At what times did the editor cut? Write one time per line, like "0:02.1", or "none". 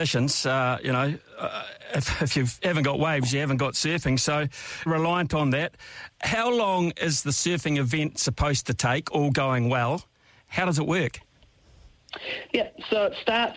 0:04.9